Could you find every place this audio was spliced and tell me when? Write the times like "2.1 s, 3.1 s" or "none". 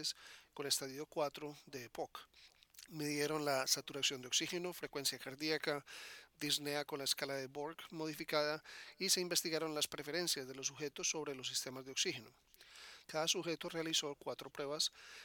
2.9 s, 13.0 s

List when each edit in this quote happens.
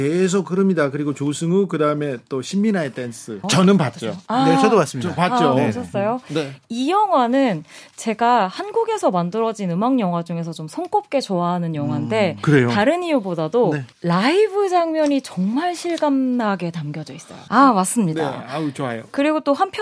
3.4 s, 13.9 s, 17.5 s

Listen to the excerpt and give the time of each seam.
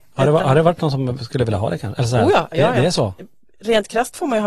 none

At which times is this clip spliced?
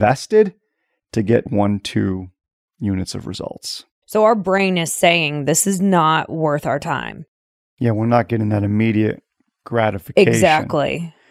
1.5 s, 4.0 s

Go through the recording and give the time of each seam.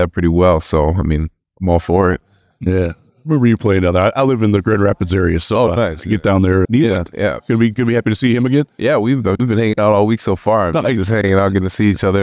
6.6 s

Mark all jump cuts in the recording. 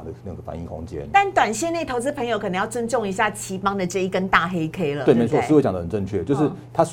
none

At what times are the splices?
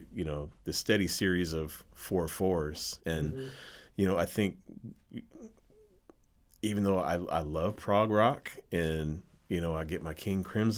3.0 s

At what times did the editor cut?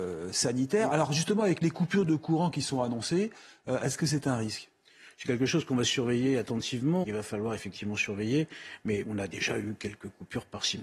7.0 s, 9.0 s

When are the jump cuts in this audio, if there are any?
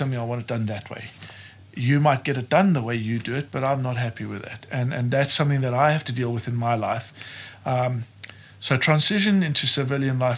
none

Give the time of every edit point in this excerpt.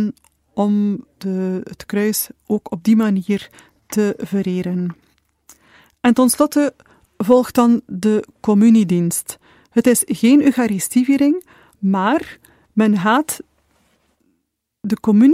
1.1 s

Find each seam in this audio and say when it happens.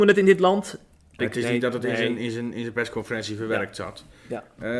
1.2 s

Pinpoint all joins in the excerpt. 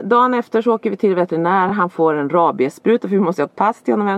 none

